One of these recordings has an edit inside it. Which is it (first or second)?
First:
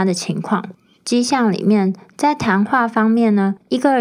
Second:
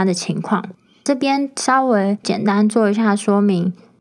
first